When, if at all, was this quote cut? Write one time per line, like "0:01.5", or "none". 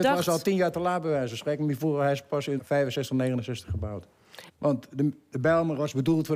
0:02.6
0:04.5